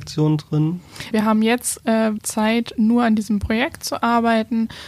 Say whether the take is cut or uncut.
cut